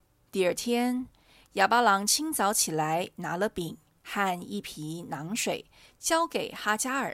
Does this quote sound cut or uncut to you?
uncut